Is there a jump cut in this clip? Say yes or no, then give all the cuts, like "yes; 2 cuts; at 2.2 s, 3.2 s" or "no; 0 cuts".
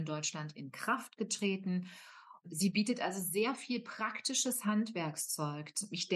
no; 0 cuts